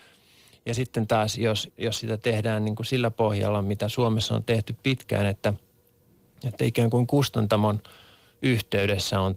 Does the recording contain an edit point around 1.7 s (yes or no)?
yes